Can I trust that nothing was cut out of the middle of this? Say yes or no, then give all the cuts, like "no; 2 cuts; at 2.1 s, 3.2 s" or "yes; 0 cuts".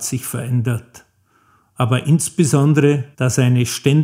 no; 1 cut; at 3.1 s